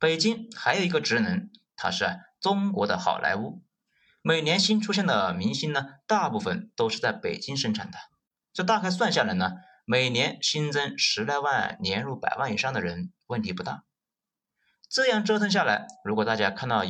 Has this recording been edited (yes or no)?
yes